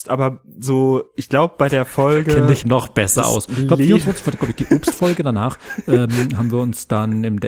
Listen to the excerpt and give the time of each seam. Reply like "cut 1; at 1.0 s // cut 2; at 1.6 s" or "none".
cut 1; at 2.6 s